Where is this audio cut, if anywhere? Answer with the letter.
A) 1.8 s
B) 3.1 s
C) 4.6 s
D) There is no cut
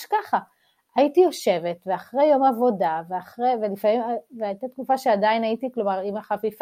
D